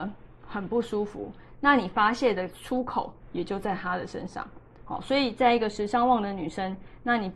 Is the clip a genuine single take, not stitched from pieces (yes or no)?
yes